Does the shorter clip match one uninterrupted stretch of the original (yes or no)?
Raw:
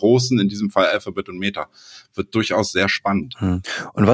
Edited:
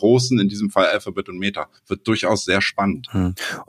no